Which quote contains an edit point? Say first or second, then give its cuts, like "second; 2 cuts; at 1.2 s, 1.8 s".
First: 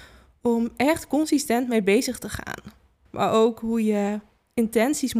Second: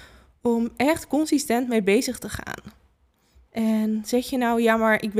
first; 1 cut; at 3.1 s